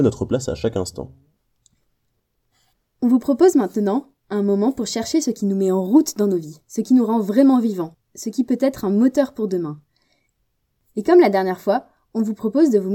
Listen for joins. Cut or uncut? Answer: uncut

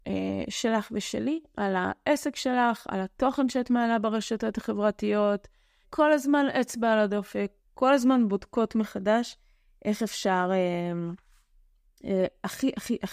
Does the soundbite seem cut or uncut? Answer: cut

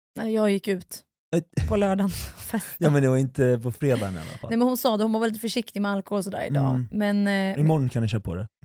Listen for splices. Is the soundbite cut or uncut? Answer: uncut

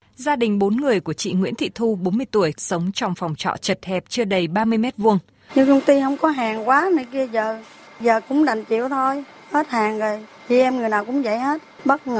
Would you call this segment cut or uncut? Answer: cut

